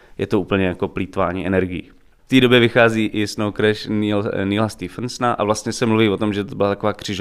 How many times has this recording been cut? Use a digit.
0